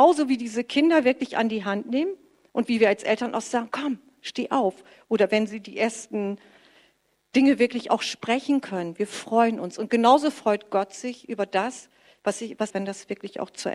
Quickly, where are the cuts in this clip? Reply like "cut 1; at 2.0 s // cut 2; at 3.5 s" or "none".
cut 1; at 3.7 s // cut 2; at 12.7 s